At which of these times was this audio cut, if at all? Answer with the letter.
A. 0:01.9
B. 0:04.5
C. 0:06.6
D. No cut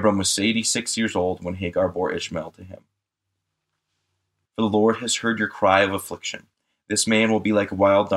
B